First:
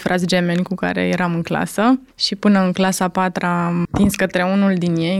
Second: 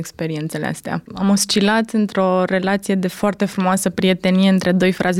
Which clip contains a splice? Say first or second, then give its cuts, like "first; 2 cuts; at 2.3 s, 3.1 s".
second; 1 cut; at 1.1 s